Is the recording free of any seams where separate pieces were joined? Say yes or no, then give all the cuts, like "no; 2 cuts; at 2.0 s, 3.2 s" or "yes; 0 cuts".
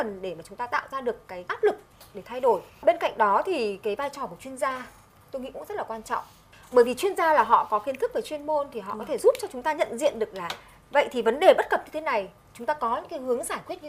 yes; 0 cuts